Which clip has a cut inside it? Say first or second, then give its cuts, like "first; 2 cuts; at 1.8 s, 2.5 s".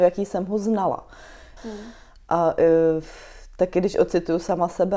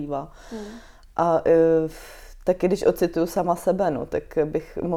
first; 1 cut; at 1.6 s